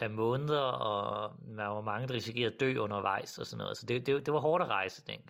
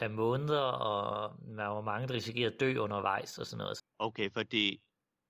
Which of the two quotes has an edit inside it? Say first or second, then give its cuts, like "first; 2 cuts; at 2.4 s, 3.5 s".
second; 1 cut; at 3.8 s